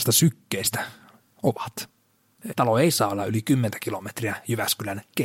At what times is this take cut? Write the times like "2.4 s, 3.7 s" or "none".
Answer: 2.5 s